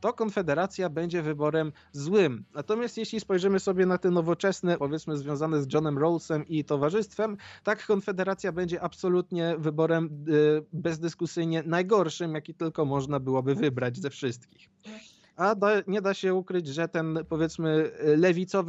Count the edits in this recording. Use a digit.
1